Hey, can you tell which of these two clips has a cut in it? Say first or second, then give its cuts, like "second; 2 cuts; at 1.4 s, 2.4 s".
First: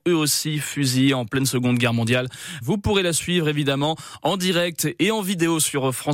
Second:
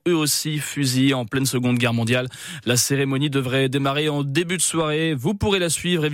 first; 1 cut; at 2.6 s